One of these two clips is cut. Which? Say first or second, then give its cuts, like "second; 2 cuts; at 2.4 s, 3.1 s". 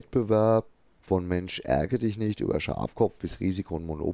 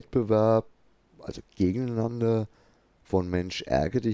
first; 1 cut; at 0.9 s